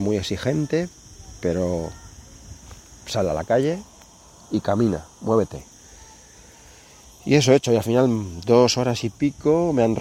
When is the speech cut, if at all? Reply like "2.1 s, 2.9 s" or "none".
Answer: none